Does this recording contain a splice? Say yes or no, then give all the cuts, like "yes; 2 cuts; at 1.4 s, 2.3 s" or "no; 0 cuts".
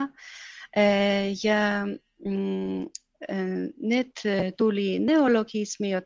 no; 0 cuts